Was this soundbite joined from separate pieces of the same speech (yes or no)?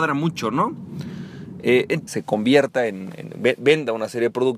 yes